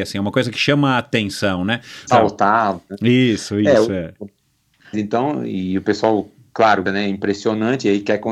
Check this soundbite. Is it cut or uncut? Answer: cut